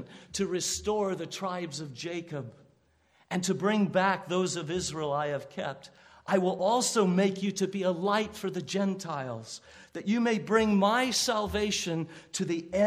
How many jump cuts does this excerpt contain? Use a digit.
0